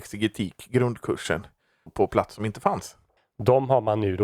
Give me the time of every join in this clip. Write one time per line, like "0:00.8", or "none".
0:01.9
0:03.2